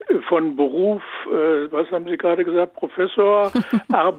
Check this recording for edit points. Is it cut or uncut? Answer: uncut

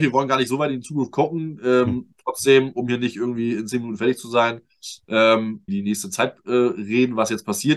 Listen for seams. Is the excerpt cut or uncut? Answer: cut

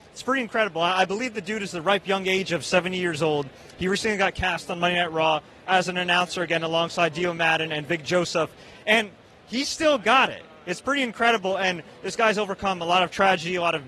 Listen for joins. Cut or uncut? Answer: uncut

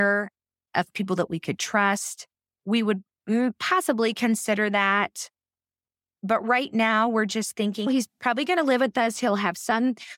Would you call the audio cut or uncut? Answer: cut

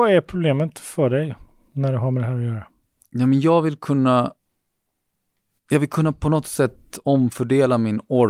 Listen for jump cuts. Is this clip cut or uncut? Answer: uncut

